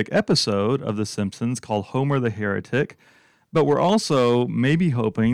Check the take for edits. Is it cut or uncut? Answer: uncut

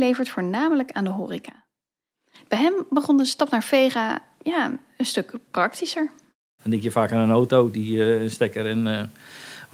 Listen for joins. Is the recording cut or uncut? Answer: cut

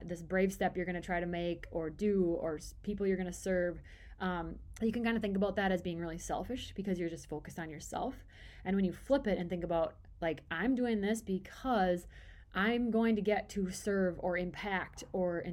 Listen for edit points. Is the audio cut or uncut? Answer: cut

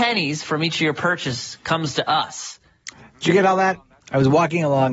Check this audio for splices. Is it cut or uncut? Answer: cut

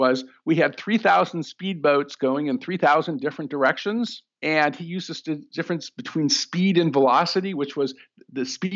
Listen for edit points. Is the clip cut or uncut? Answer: uncut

